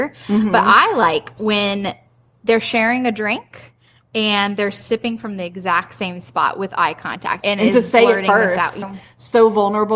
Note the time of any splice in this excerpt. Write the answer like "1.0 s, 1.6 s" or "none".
7.4 s, 8.8 s